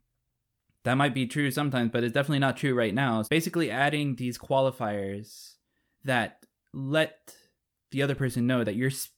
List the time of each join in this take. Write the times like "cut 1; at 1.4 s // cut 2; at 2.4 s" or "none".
cut 1; at 3.2 s